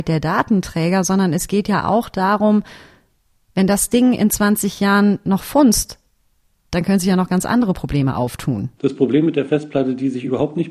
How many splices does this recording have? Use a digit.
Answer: 1